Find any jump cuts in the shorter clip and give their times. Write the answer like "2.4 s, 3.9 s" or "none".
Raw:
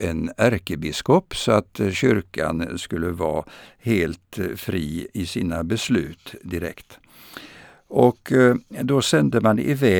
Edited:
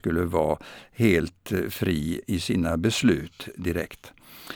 none